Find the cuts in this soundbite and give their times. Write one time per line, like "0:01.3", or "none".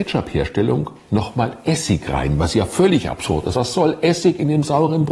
none